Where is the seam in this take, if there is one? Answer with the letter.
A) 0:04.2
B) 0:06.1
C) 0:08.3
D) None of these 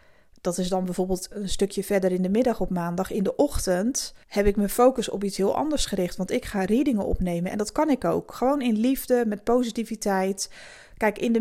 A